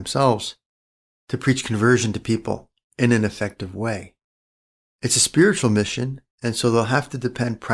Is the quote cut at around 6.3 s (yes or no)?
yes